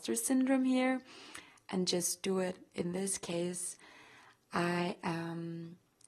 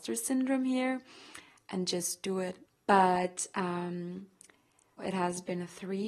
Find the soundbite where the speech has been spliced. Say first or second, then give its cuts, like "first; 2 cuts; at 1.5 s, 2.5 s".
second; 2 cuts; at 2.7 s, 5.0 s